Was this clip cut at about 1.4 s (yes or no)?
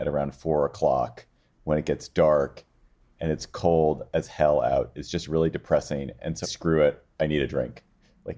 no